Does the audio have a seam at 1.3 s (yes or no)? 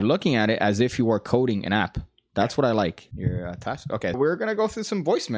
no